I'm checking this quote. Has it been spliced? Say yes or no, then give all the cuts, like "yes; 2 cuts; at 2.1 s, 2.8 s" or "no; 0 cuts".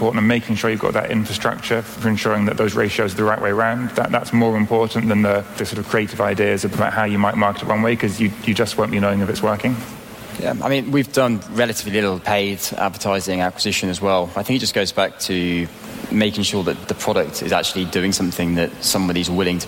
no; 0 cuts